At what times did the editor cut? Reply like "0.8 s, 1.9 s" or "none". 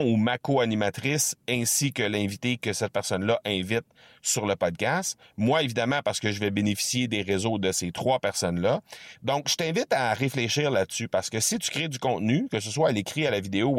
9.2 s